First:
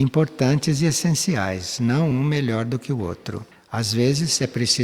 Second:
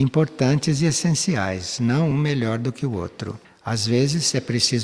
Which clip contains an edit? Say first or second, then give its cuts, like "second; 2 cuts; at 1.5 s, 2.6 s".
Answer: second; 1 cut; at 2.1 s